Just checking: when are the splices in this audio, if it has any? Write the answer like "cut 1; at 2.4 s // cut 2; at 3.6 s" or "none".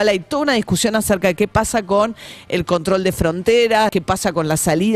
cut 1; at 3.9 s